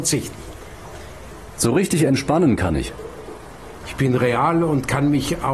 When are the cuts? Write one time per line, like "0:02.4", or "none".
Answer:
0:03.8

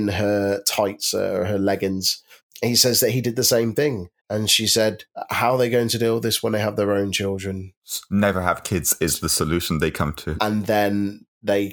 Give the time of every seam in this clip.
0:04.2
0:10.4

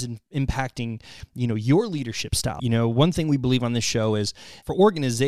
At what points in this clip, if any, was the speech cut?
0:02.6

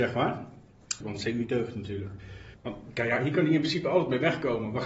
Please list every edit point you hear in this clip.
0:01.0
0:02.5

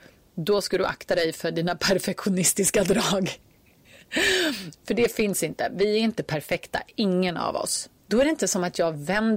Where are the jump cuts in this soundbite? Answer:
0:08.0

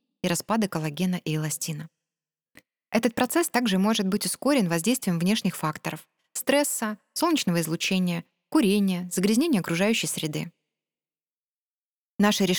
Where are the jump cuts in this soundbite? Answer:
none

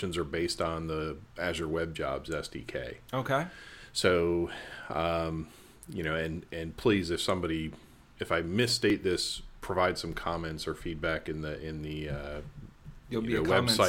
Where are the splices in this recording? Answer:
none

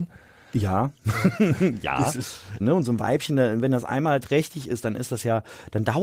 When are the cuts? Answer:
0:02.6

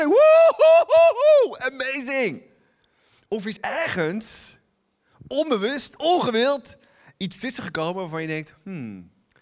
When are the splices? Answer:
0:03.6

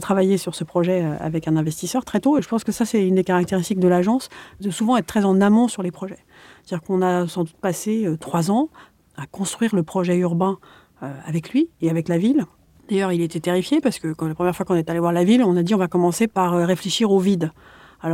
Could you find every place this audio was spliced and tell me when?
none

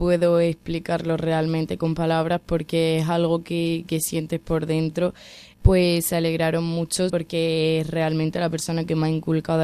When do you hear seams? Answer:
0:05.5
0:07.1

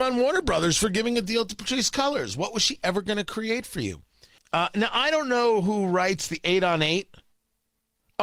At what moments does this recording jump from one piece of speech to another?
0:04.4

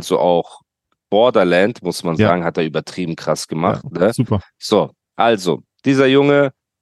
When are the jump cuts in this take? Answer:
none

